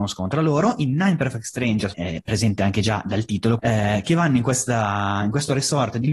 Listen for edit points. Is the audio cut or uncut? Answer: cut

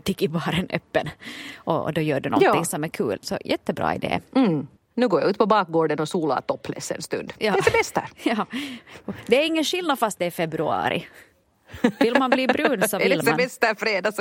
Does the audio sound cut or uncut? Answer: cut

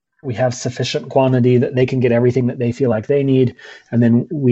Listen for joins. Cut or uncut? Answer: uncut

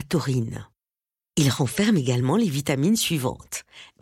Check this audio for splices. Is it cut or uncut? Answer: uncut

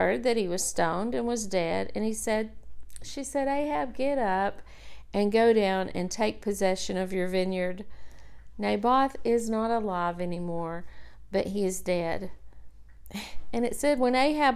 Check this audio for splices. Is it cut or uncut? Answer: uncut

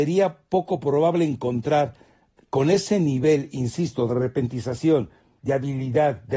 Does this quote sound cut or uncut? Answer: cut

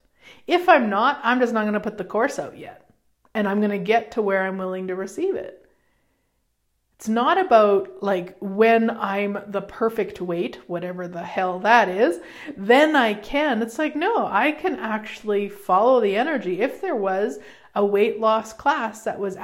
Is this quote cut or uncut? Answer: uncut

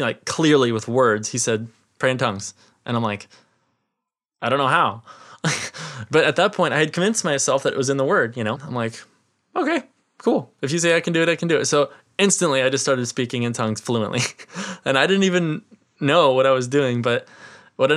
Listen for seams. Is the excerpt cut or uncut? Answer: cut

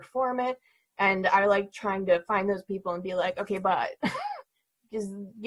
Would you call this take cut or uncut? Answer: uncut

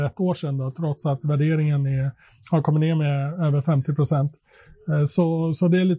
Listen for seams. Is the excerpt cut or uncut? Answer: uncut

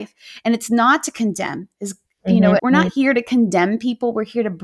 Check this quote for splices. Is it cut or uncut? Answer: cut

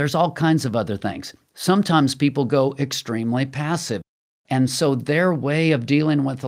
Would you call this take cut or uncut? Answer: uncut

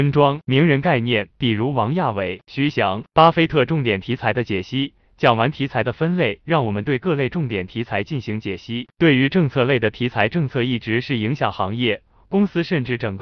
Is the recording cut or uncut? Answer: uncut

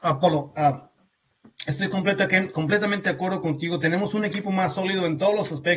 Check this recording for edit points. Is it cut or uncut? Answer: uncut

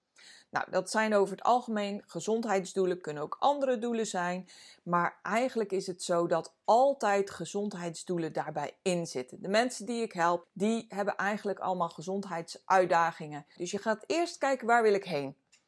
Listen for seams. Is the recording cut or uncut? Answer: cut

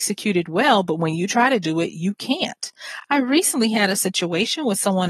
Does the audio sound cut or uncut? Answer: uncut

